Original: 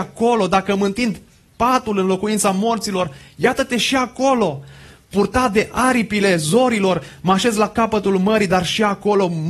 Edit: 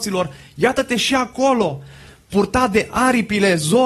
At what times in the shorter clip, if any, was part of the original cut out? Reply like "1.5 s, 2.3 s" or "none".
none